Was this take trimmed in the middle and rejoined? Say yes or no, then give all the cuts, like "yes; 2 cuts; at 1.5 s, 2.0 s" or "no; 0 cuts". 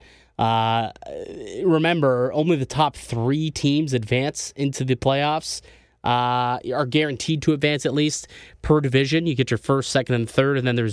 no; 0 cuts